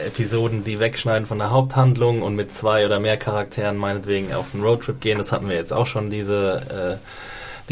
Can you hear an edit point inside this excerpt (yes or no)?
no